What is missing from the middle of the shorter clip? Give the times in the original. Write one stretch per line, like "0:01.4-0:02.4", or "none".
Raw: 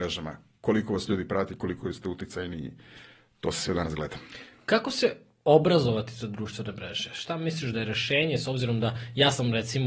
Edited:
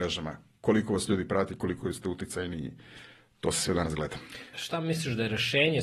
0:04.5-0:07.1